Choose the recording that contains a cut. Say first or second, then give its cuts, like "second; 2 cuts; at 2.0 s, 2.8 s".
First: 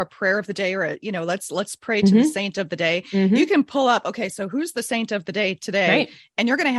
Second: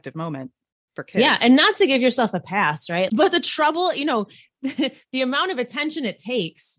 second; 1 cut; at 3.1 s